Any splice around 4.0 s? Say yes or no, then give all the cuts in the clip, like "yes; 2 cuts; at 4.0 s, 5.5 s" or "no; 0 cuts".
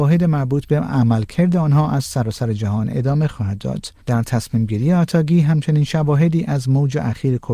yes; 1 cut; at 4.0 s